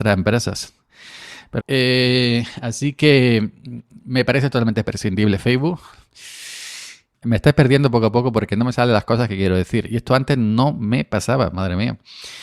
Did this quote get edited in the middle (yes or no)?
yes